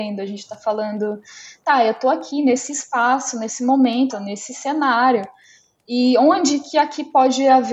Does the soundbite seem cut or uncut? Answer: cut